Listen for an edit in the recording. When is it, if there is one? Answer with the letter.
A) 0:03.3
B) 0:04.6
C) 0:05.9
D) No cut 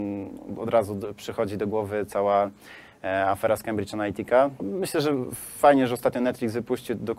B